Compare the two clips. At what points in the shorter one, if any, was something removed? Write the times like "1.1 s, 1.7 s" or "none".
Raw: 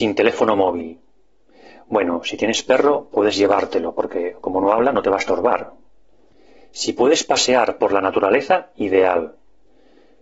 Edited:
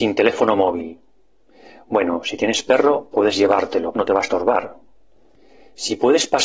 3.9 s